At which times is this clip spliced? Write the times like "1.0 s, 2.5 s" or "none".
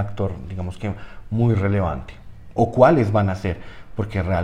2.6 s